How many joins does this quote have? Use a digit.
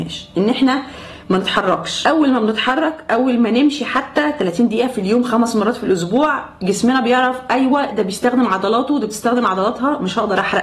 1